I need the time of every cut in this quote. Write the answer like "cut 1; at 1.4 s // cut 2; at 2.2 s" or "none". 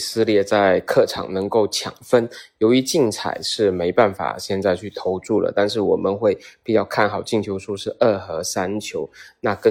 none